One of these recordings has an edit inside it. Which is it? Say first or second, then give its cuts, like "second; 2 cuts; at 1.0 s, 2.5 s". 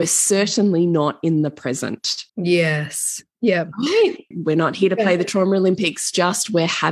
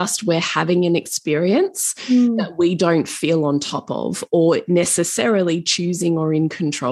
first; 2 cuts; at 2.3 s, 4.3 s